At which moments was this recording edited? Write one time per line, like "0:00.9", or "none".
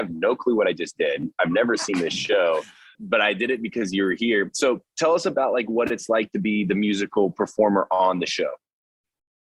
0:02.9